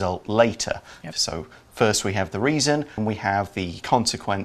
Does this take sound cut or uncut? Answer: cut